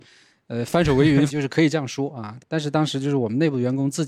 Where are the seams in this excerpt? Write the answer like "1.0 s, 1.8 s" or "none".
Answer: 1.3 s, 2.4 s